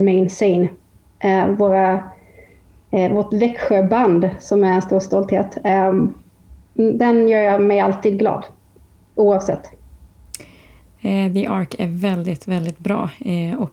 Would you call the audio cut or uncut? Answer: uncut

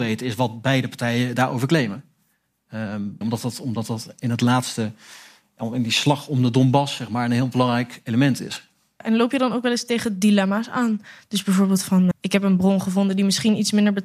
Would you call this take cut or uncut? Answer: cut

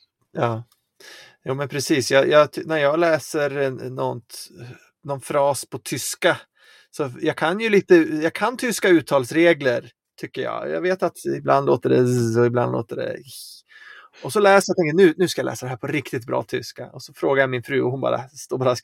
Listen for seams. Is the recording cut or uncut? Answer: uncut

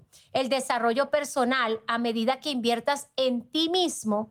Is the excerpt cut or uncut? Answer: uncut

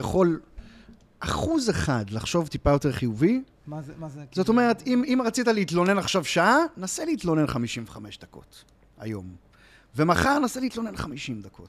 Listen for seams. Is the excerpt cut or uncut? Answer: uncut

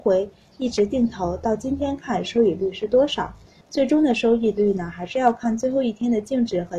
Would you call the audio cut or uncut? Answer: cut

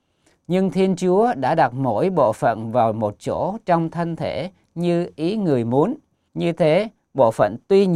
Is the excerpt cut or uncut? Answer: cut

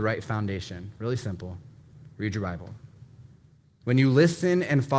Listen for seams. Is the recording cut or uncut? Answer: cut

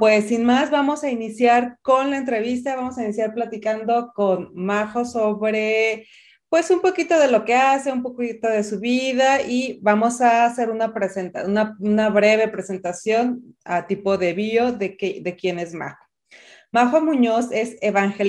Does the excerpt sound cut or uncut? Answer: uncut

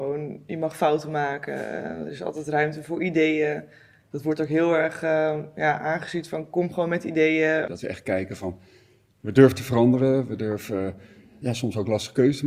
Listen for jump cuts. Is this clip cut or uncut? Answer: cut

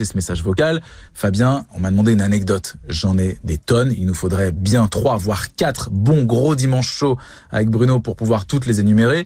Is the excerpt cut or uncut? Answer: uncut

